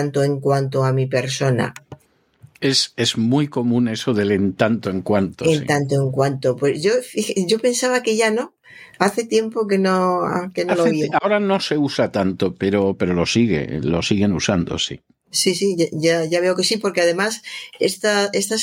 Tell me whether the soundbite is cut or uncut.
uncut